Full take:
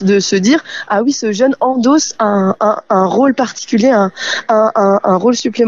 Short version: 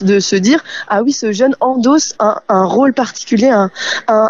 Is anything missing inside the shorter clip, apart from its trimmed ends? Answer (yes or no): yes